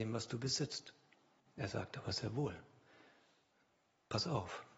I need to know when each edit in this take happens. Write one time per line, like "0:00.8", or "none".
0:01.4